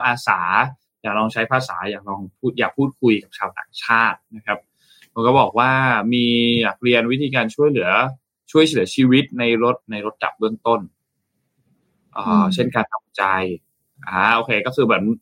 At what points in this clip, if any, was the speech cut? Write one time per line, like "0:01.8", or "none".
0:09.8